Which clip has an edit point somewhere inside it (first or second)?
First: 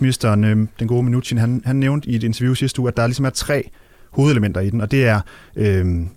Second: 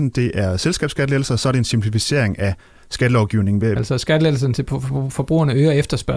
second